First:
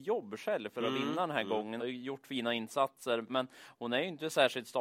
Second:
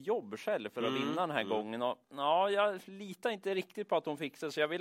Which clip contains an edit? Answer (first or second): first